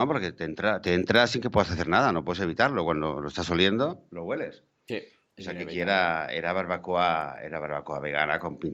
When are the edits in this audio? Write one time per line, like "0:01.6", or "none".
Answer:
none